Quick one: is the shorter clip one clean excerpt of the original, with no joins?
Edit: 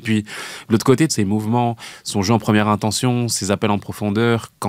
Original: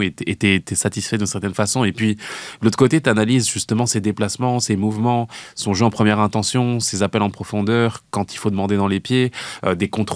no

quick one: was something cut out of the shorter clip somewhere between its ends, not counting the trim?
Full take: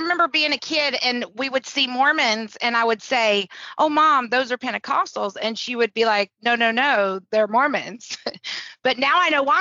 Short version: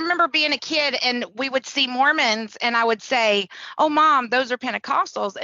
no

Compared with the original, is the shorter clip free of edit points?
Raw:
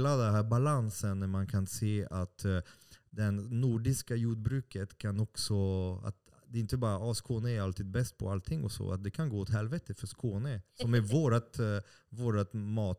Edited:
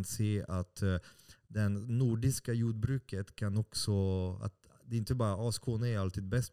yes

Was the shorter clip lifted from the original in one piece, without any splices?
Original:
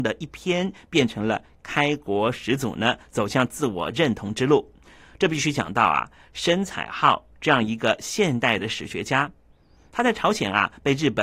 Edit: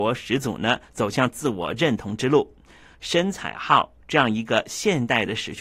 no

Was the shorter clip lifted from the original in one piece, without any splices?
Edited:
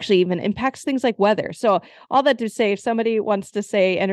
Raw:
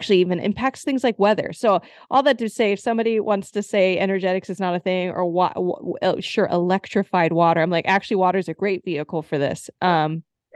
yes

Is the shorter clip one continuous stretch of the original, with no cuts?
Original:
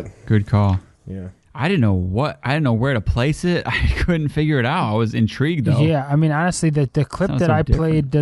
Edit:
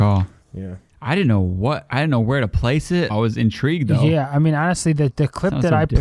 no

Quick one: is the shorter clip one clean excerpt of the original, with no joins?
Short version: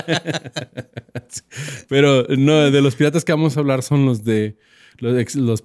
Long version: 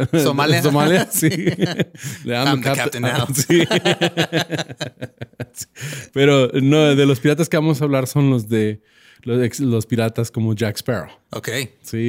yes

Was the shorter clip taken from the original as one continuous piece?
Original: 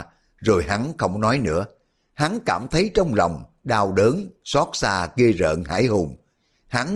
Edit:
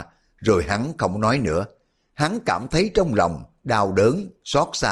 yes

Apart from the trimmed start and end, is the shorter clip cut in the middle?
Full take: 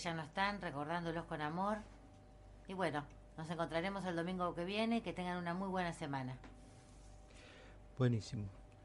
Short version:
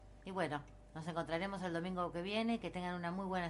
no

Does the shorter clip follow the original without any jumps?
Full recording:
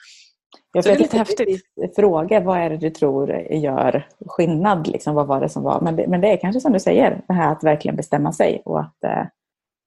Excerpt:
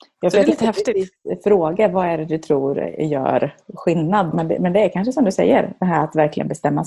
no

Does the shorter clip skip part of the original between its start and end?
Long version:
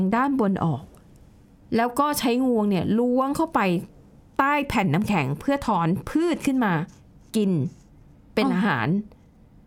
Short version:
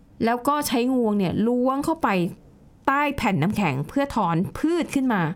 no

